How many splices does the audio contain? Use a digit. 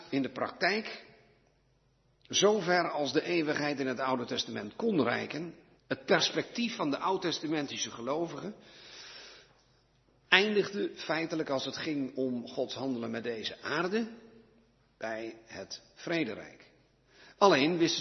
1